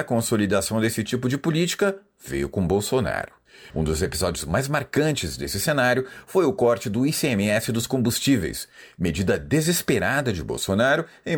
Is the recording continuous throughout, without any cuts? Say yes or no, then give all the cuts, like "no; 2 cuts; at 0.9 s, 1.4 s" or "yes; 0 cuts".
no; 1 cut; at 3.7 s